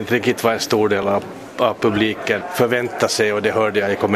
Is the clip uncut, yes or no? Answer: yes